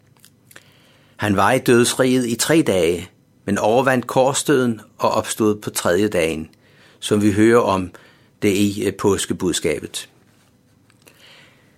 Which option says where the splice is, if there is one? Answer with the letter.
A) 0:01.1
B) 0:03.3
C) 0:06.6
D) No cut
D